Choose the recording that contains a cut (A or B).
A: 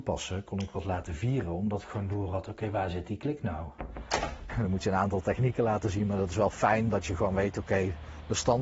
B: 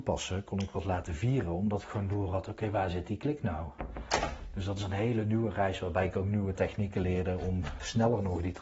A